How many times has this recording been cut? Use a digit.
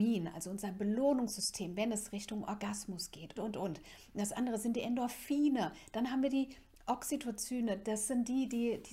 1